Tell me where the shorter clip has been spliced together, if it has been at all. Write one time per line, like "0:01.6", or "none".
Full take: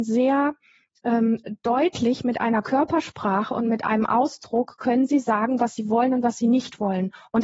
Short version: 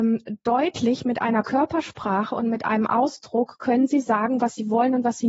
none